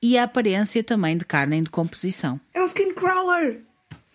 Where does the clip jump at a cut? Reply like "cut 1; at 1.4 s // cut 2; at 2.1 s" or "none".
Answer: cut 1; at 2.5 s